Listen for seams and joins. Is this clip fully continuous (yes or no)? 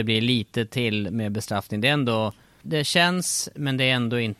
no